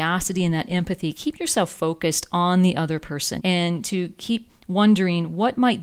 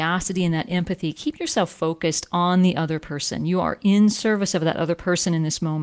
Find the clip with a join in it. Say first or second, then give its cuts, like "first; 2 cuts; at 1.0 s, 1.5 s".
first; 1 cut; at 3.4 s